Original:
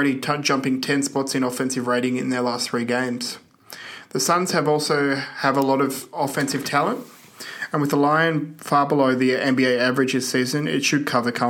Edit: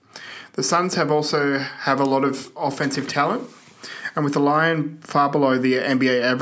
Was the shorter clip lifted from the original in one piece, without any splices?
yes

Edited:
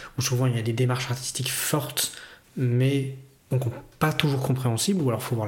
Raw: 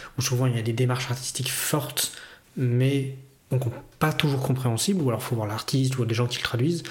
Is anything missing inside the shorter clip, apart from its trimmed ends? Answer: no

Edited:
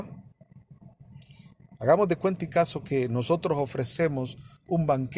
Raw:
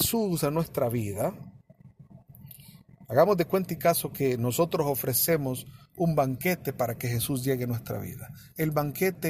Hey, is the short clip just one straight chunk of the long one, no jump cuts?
yes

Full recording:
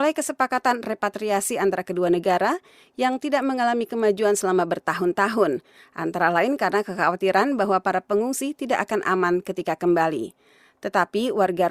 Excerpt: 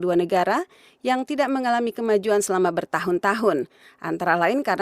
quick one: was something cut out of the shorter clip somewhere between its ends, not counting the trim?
no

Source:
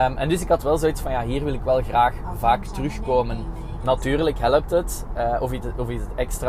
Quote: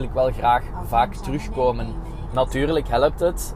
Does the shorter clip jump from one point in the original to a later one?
no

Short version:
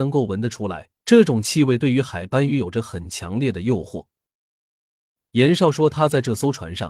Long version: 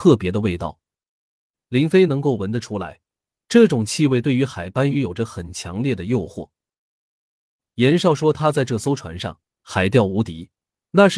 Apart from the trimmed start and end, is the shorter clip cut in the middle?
yes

